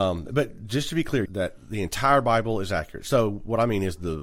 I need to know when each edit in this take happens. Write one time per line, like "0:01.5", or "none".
0:01.3

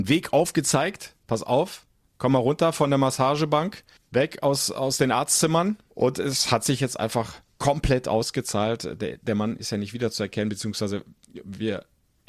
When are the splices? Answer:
0:05.9

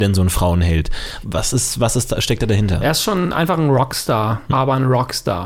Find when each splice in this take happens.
0:01.2
0:04.5

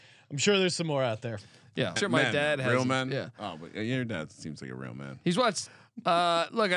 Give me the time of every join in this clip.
0:02.0
0:05.7

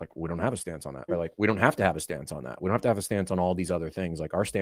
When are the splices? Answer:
0:01.1

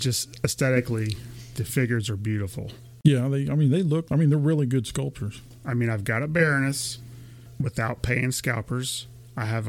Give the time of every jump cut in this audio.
0:05.6

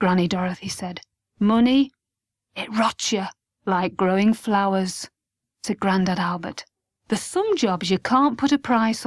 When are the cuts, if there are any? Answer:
0:03.4
0:07.0

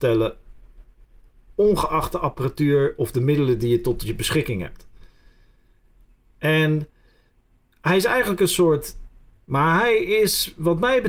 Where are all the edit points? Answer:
0:09.3

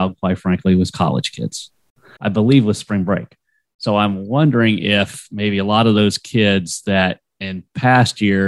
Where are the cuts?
0:02.2

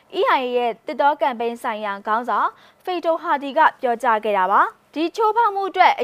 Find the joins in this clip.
0:04.9

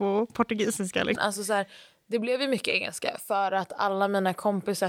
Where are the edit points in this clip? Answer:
0:01.2

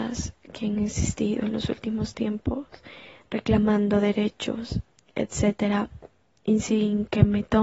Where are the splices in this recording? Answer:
0:04.9

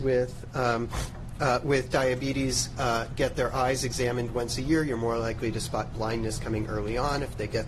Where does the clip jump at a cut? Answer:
none

